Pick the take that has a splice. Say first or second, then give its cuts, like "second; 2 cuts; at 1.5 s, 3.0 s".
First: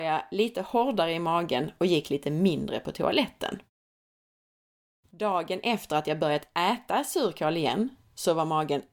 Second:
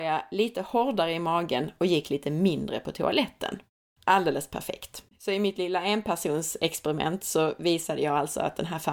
second; 2 cuts; at 4.0 s, 5.1 s